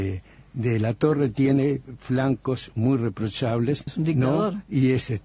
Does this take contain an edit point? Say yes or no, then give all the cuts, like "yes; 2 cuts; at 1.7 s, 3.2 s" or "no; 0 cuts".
yes; 1 cut; at 3.9 s